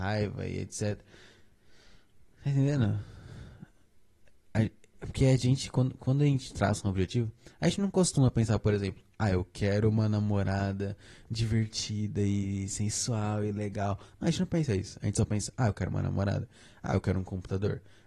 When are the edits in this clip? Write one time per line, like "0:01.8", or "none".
none